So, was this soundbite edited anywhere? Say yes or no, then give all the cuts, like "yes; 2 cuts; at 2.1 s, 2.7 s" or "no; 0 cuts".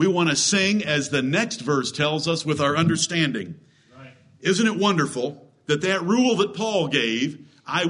no; 0 cuts